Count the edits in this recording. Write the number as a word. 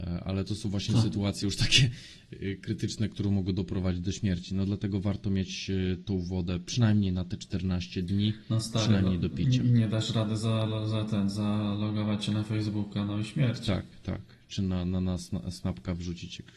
zero